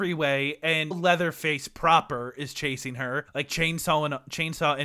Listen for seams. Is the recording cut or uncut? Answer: cut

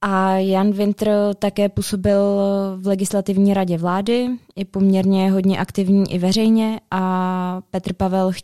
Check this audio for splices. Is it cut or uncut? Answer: uncut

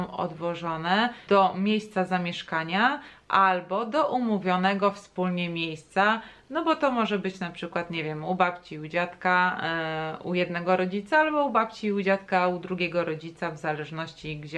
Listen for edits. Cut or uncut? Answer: cut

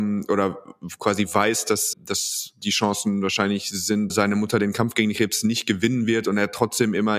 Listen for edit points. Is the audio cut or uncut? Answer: cut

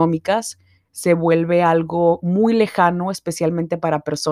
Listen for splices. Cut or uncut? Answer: uncut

